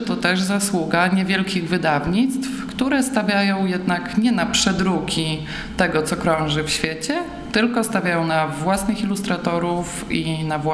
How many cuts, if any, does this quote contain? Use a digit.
0